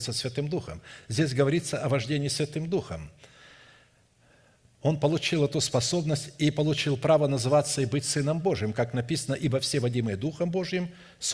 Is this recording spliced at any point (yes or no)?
no